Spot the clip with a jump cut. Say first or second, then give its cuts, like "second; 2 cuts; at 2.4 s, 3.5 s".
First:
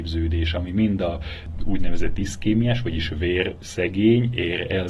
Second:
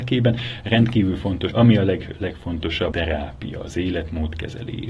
second; 2 cuts; at 1.5 s, 2.9 s